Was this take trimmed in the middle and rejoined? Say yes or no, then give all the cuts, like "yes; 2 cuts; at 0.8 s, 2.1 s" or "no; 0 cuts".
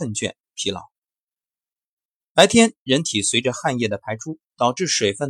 no; 0 cuts